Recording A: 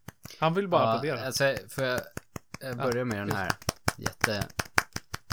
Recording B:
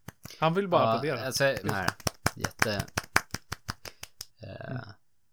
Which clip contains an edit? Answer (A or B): B